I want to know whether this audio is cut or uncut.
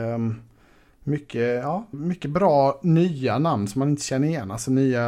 cut